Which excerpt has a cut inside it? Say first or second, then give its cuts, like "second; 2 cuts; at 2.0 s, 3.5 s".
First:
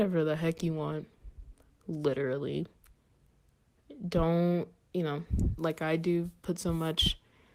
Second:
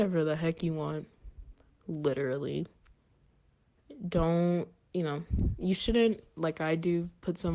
first; 1 cut; at 5.6 s